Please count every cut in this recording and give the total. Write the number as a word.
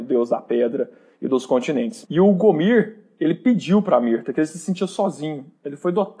zero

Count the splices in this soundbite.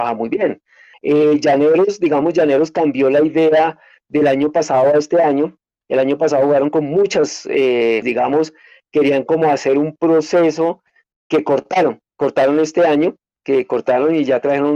two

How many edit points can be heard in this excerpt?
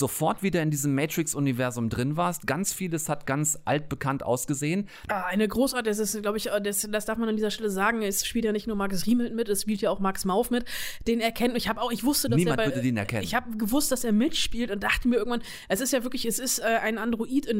one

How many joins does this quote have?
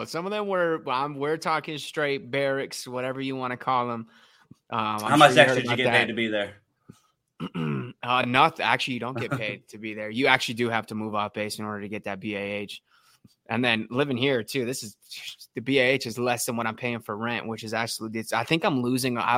zero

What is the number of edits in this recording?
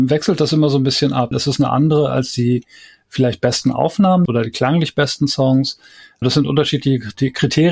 two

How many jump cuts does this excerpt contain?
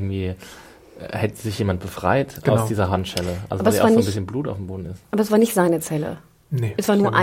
zero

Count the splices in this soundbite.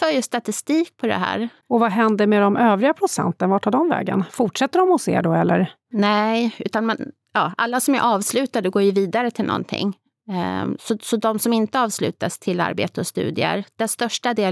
one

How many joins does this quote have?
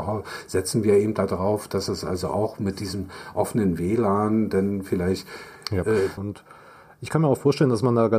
one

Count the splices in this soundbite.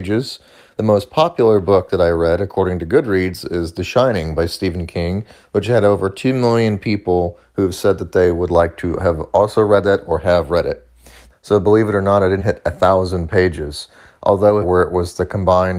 three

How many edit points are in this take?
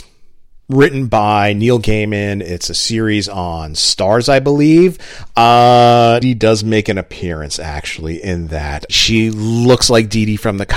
two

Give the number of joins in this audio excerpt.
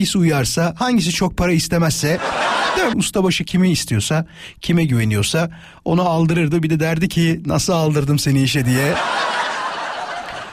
one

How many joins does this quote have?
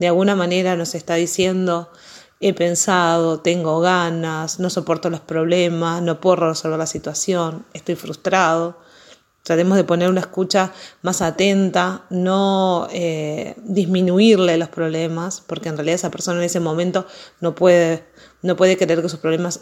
zero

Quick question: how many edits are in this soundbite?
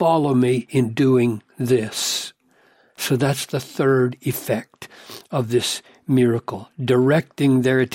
zero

